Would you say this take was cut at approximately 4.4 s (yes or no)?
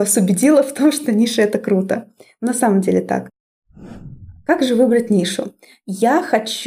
no